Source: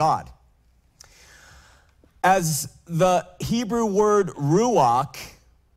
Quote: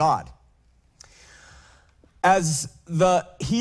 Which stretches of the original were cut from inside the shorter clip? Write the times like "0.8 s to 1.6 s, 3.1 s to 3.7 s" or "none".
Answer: none